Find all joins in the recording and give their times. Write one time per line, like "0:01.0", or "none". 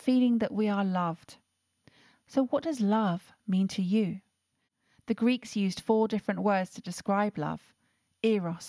none